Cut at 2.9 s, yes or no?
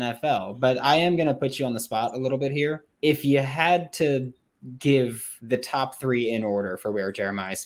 yes